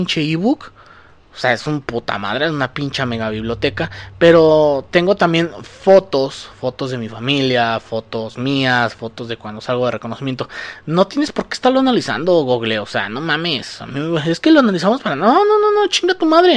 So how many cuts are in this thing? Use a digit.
0